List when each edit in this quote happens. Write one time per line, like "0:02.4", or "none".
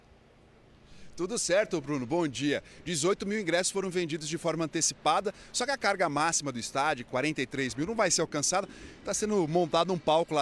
none